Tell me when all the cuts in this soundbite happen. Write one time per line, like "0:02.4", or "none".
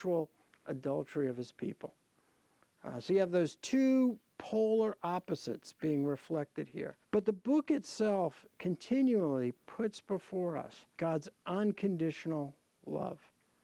0:07.0
0:10.9